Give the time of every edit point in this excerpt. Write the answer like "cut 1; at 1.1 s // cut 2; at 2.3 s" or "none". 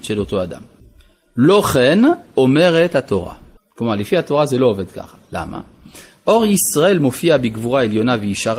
none